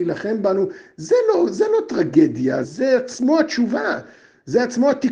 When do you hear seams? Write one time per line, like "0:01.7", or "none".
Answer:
0:02.6